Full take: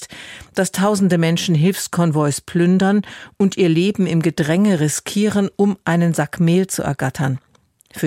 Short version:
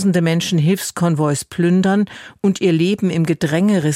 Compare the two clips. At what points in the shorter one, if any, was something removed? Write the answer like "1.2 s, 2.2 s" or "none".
none